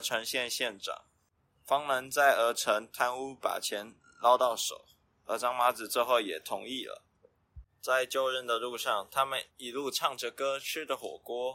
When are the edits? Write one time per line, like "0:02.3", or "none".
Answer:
0:09.5